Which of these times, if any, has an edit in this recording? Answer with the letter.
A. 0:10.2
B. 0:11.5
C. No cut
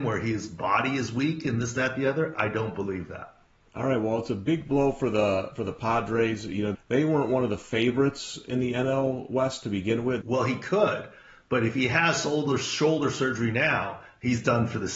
A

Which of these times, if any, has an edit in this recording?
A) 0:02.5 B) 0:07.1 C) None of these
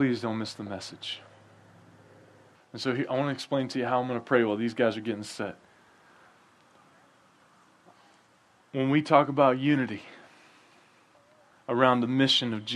A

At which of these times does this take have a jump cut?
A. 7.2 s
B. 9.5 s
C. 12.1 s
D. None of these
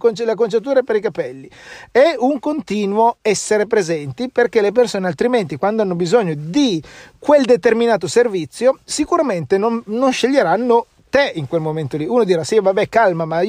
D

